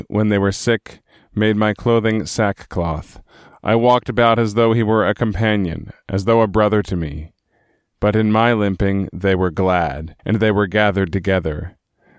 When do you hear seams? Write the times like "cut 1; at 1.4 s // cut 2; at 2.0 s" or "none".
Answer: cut 1; at 3.5 s // cut 2; at 7.9 s // cut 3; at 10.2 s